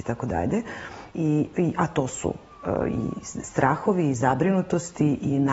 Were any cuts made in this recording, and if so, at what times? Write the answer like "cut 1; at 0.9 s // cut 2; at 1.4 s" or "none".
cut 1; at 1.1 s